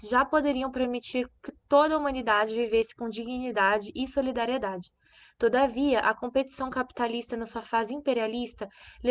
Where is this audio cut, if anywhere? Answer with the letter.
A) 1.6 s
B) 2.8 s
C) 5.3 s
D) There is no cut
D